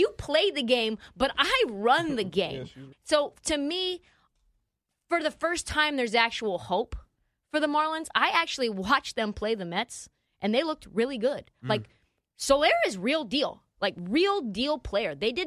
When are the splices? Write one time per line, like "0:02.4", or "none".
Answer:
0:02.9